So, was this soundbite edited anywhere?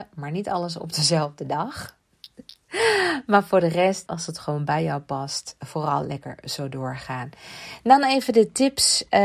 yes; 1 cut; at 4.1 s

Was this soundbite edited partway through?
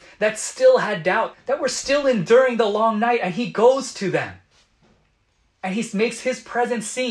yes; 1 cut; at 1.3 s

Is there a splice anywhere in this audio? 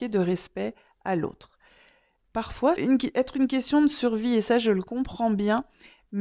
yes; 1 cut; at 2.8 s

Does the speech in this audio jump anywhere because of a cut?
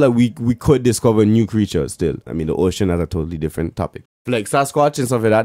yes; 2 cuts; at 2.3 s, 4.1 s

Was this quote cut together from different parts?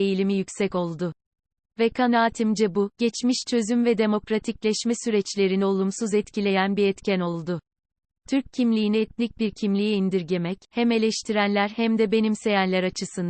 no; 0 cuts

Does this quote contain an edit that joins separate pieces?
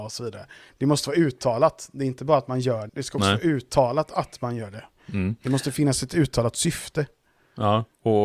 yes; 1 cut; at 2.9 s

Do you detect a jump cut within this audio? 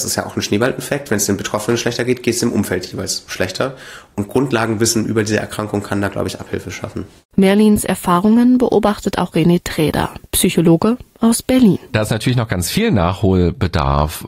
no; 0 cuts

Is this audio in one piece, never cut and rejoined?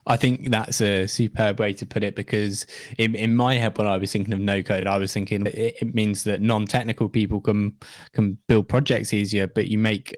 yes; 0 cuts

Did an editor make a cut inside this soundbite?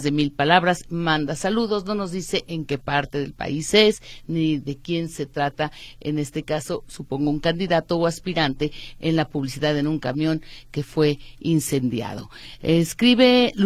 no; 0 cuts

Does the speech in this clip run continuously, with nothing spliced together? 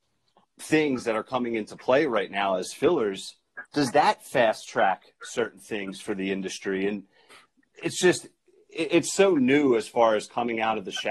yes; 0 cuts

